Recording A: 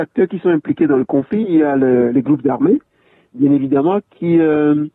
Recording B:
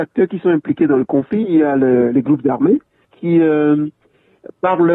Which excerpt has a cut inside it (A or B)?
B